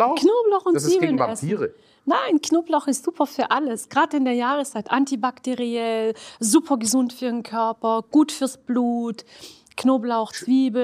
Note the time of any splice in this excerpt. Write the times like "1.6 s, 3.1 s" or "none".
none